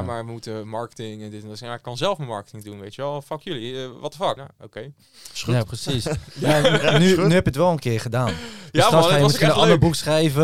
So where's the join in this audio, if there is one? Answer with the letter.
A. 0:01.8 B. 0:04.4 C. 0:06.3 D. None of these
B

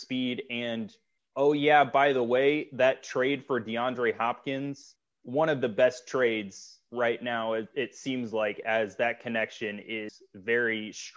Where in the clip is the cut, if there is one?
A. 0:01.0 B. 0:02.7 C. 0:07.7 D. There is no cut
D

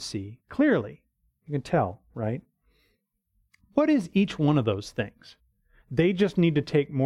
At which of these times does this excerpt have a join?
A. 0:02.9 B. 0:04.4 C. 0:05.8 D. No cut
C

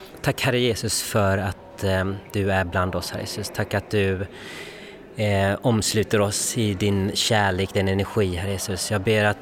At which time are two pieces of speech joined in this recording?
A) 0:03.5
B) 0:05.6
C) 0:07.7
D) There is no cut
D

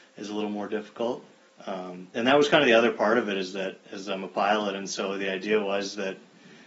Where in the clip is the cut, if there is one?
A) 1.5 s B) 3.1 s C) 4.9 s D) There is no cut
A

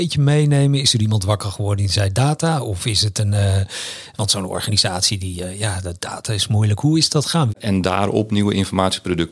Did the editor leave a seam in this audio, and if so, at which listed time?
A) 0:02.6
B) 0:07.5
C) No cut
B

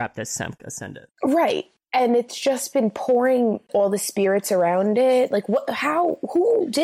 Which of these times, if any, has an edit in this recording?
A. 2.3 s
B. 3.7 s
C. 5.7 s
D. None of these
B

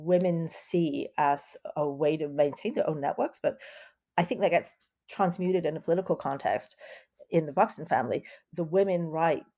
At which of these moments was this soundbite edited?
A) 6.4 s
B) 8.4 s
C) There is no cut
C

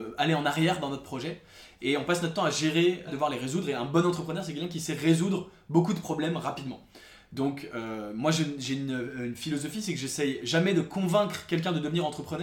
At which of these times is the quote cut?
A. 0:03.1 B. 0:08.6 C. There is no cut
A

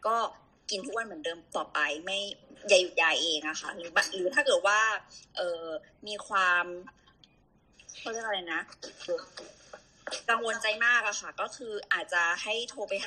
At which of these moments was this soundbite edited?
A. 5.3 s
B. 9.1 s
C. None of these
B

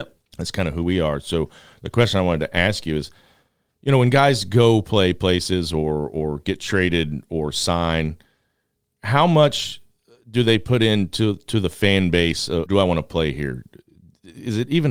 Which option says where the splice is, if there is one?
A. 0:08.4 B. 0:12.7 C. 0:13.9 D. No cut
B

